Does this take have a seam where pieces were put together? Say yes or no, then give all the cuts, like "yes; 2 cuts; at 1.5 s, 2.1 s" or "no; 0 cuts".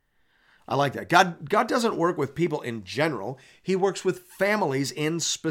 no; 0 cuts